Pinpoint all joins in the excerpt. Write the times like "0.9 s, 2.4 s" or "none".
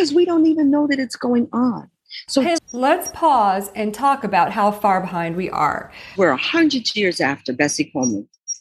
2.6 s, 6.2 s